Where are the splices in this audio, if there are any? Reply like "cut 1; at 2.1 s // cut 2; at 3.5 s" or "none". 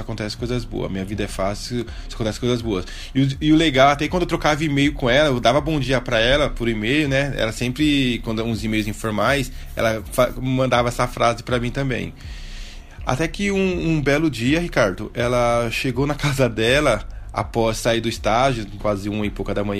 cut 1; at 18.8 s